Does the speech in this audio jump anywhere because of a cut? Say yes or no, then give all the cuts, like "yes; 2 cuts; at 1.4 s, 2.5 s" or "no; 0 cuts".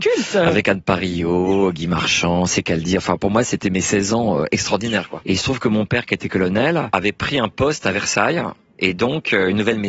yes; 1 cut; at 5.2 s